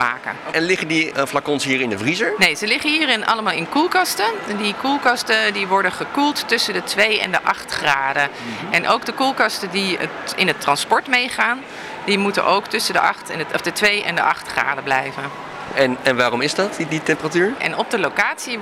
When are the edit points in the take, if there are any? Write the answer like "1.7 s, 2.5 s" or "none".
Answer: 17.6 s